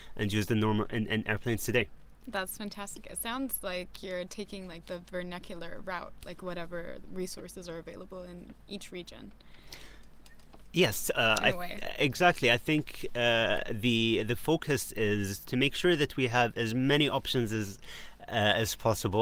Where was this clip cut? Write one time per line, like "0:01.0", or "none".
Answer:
none